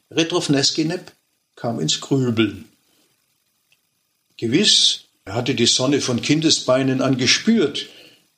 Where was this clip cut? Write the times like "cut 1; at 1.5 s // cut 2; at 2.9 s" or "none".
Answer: cut 1; at 5.3 s